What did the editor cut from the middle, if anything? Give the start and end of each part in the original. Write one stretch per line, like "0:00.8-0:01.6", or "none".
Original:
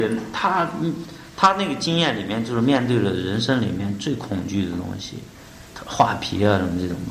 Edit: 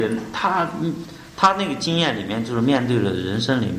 none